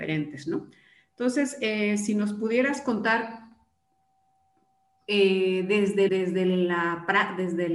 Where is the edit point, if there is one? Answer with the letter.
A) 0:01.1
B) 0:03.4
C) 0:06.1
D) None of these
C